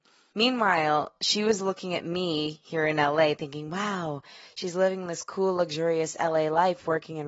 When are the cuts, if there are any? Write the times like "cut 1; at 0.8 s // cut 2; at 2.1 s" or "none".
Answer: none